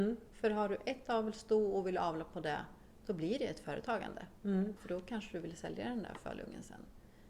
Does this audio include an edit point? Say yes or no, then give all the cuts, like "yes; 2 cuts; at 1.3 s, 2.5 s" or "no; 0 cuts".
yes; 1 cut; at 4.8 s